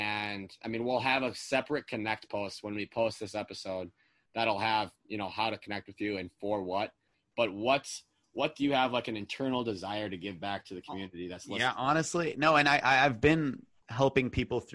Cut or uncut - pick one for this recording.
uncut